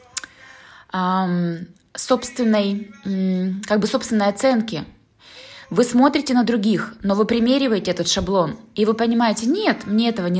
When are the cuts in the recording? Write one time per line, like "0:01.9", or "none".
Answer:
none